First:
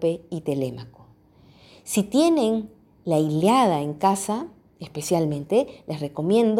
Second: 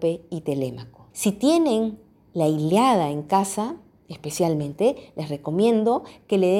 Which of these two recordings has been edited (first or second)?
second